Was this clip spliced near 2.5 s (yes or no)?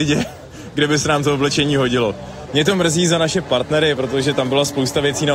yes